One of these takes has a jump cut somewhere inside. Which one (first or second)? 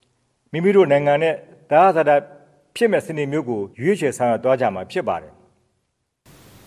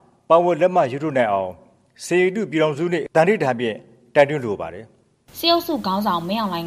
first